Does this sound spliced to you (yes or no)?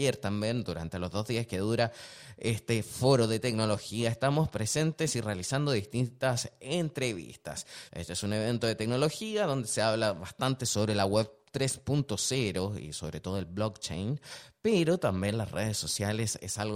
yes